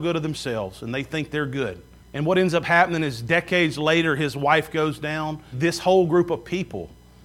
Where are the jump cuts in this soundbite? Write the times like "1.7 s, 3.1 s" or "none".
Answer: 2.0 s, 5.5 s